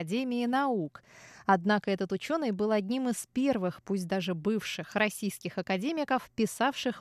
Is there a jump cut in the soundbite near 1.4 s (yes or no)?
no